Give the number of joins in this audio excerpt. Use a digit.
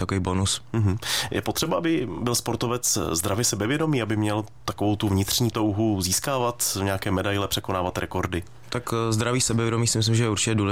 0